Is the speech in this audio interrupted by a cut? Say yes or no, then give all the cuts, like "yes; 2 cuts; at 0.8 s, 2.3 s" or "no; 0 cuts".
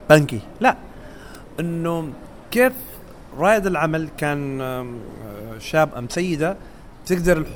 yes; 1 cut; at 5.9 s